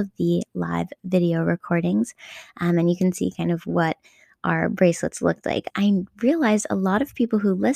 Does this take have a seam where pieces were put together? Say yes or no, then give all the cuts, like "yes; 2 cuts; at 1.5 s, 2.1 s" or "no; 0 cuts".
yes; 1 cut; at 5.7 s